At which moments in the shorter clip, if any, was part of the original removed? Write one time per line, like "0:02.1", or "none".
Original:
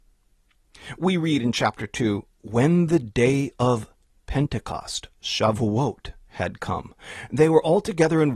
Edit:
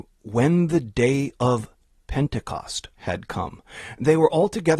0:02.9